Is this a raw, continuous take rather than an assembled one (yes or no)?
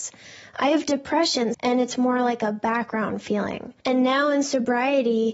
no